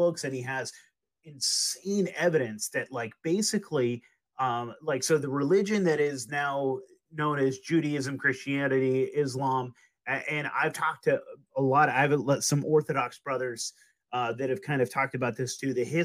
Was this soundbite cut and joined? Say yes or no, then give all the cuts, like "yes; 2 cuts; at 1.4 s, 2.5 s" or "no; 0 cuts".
no; 0 cuts